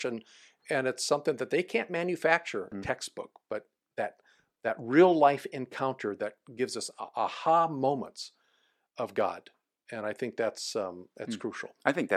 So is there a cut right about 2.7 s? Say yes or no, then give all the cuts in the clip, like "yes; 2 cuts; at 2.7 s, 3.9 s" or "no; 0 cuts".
yes; 1 cut; at 2.7 s